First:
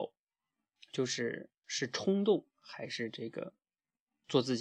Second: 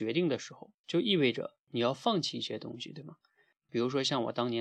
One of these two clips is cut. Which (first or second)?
second